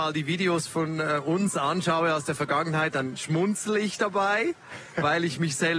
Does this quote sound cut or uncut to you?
uncut